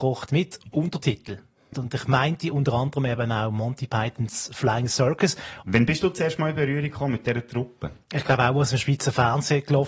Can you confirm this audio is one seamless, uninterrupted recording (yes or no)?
no